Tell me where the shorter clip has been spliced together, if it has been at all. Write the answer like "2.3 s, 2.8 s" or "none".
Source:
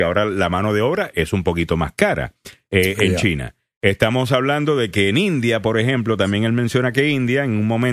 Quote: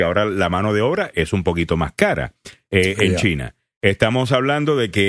none